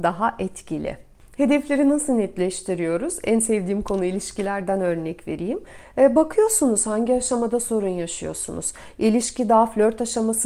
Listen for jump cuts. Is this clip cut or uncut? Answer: uncut